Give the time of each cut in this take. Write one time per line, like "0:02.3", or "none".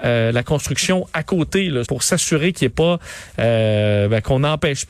0:01.8